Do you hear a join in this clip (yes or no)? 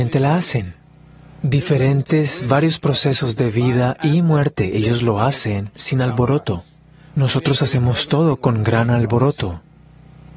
no